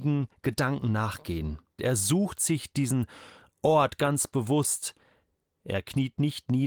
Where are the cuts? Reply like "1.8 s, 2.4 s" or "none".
1.8 s